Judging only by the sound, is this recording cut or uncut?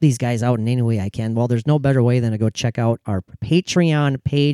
cut